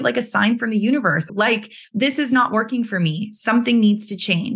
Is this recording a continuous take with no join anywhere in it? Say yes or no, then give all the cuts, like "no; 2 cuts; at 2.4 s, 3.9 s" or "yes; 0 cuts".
no; 1 cut; at 1.3 s